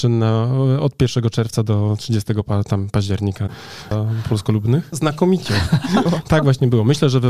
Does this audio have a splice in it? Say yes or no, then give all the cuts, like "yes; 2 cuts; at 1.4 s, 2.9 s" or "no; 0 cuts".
yes; 3 cuts; at 3.9 s, 4.9 s, 6.1 s